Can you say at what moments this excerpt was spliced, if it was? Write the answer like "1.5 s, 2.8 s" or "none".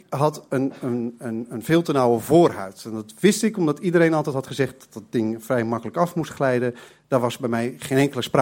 none